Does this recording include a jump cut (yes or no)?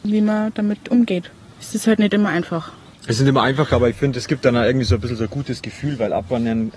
no